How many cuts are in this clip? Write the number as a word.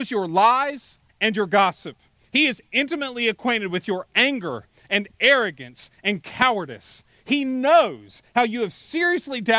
one